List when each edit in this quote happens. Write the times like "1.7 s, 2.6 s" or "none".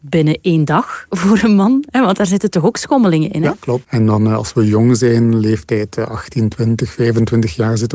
3.8 s